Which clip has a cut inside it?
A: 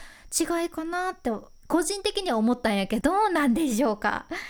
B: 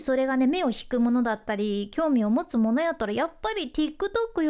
A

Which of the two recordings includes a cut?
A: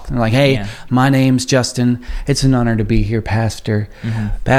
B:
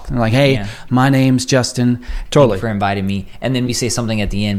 B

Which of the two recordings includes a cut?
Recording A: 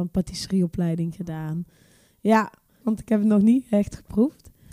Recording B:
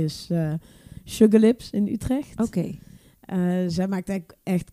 A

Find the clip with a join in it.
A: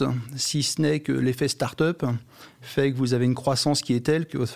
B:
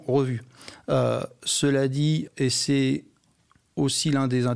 B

